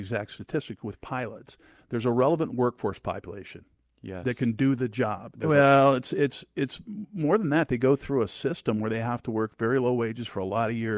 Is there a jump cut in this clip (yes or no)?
yes